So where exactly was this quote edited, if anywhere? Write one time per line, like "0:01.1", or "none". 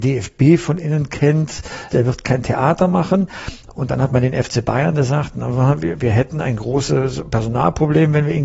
0:01.9